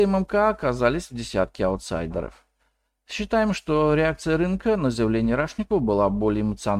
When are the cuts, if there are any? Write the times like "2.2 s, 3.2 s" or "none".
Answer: none